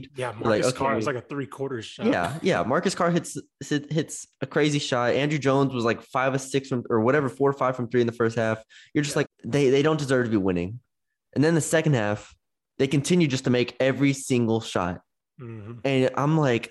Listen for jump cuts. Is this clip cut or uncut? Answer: cut